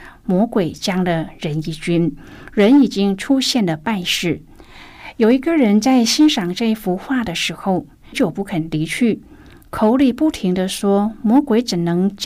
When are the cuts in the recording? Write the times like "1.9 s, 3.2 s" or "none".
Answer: 8.1 s